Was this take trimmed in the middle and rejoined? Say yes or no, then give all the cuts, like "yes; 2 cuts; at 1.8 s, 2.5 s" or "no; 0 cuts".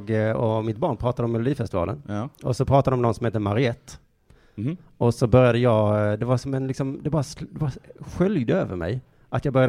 no; 0 cuts